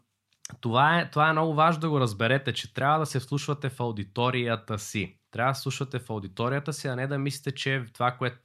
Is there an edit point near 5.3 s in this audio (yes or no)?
yes